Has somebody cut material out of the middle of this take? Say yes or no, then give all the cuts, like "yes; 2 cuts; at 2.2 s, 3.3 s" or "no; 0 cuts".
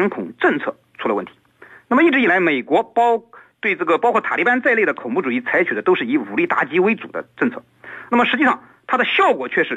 no; 0 cuts